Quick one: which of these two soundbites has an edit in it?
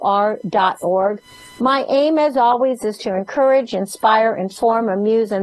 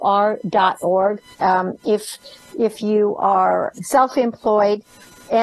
second; 2 cuts; at 1.3 s, 3.7 s

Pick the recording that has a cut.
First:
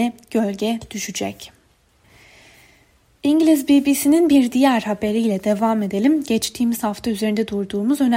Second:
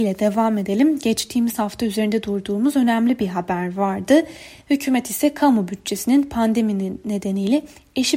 second; 1 cut; at 4.6 s

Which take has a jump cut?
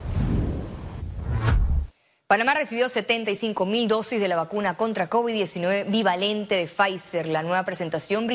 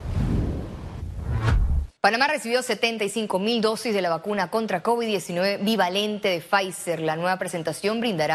second; 1 cut; at 2.0 s

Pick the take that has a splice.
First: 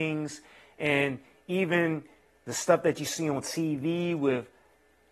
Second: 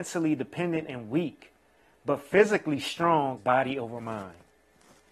second; 1 cut; at 3.4 s

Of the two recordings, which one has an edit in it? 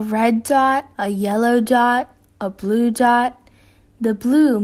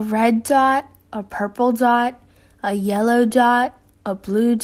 first; 1 cut; at 0.9 s

